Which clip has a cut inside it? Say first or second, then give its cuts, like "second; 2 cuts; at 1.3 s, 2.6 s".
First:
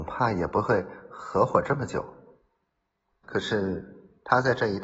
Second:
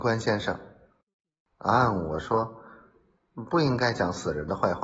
first; 1 cut; at 3.2 s